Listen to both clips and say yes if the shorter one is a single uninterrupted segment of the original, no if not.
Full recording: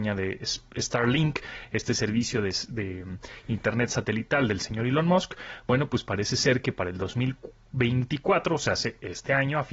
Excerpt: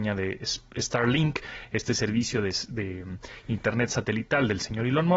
yes